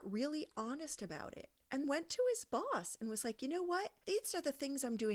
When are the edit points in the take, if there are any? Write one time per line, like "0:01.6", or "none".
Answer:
0:01.8